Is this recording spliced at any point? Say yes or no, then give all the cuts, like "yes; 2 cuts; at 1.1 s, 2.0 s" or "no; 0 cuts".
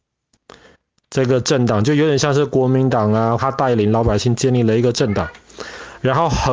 yes; 1 cut; at 3.4 s